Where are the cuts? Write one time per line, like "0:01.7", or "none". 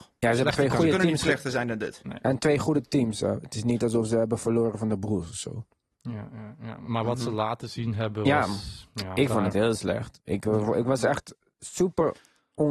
none